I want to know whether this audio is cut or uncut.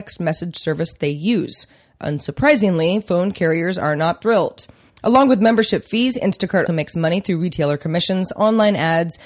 cut